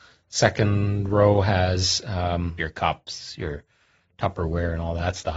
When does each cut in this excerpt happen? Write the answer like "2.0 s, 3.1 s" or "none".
2.6 s